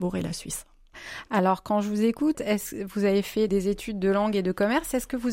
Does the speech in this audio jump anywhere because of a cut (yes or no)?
yes